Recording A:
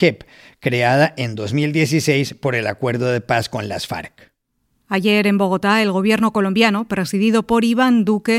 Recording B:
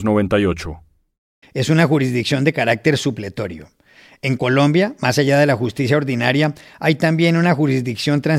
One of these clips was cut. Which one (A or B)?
B